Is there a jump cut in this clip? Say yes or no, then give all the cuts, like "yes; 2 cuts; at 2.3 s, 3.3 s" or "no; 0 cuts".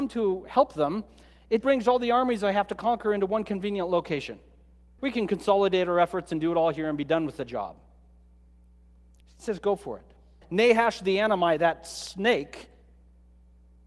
yes; 3 cuts; at 1.6 s, 5.0 s, 10.4 s